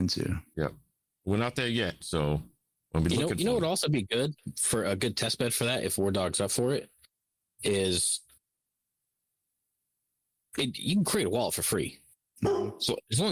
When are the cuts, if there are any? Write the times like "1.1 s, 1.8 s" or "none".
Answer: 2.0 s